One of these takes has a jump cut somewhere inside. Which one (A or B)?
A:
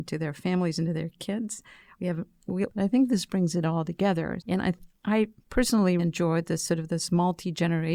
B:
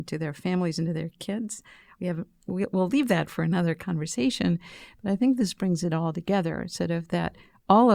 A